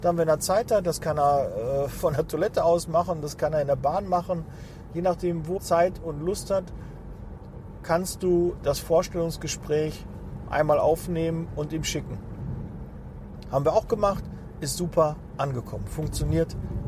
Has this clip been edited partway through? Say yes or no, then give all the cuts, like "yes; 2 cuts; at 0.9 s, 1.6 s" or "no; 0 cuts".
yes; 1 cut; at 5.6 s